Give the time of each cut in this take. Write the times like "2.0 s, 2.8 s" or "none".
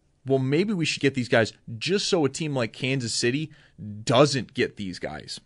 1.0 s